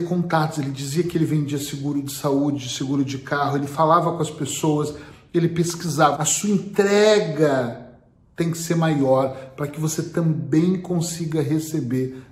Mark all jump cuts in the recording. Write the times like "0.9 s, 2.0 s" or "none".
6.2 s

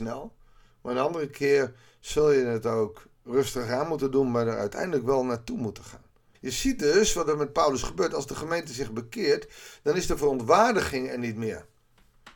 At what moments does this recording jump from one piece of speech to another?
6.3 s

